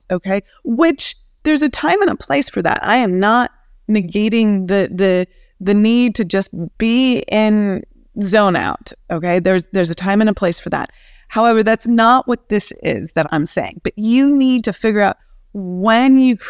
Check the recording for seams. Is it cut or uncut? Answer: cut